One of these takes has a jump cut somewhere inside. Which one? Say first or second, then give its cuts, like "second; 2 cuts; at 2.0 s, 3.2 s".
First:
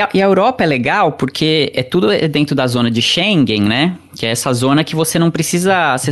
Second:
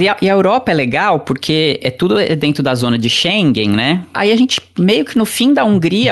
second; 1 cut; at 4.1 s